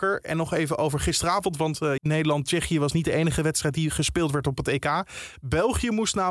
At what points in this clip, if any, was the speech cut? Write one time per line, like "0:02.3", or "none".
0:02.0